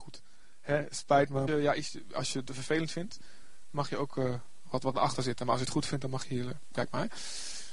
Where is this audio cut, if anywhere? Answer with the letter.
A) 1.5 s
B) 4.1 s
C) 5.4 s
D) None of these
A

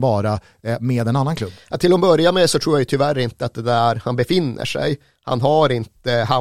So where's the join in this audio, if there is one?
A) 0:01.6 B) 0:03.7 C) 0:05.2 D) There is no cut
D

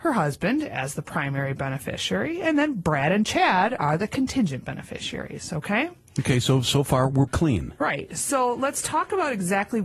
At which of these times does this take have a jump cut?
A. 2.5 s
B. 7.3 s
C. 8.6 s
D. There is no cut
B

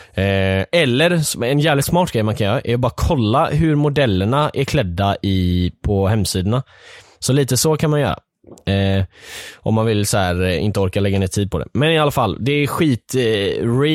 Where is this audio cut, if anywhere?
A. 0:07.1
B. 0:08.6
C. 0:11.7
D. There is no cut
A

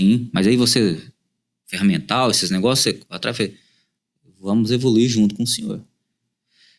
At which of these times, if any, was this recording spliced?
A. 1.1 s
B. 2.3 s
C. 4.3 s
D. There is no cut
D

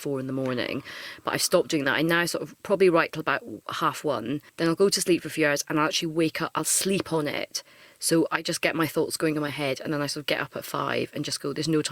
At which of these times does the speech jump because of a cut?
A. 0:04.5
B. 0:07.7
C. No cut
A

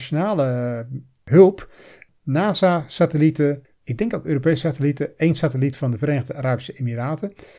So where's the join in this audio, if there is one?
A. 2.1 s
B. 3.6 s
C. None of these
B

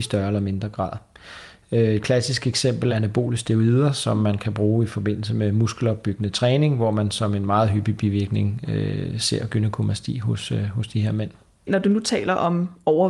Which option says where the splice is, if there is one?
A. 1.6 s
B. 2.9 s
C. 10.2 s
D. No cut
B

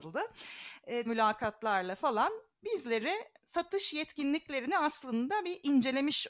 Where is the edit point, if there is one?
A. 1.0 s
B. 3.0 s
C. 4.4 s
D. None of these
A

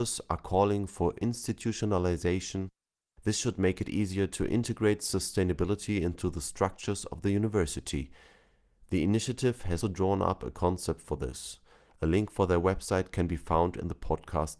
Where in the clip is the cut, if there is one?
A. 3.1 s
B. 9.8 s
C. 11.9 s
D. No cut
B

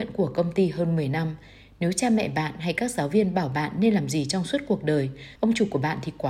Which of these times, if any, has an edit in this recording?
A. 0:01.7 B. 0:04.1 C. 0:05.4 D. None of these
C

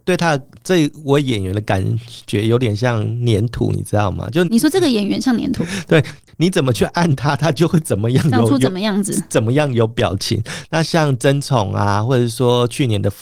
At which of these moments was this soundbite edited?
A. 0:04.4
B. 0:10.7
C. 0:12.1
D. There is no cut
A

